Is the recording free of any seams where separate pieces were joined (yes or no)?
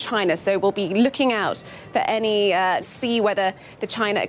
no